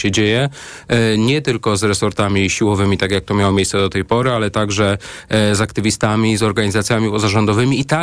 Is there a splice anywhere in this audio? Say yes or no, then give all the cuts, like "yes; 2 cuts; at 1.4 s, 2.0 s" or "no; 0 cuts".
no; 0 cuts